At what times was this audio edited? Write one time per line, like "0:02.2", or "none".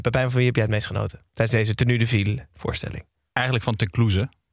0:01.3